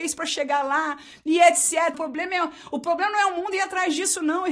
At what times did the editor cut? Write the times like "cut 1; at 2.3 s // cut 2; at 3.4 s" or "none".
cut 1; at 1.9 s